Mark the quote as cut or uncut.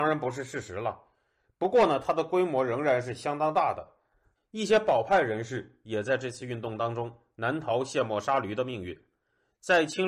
cut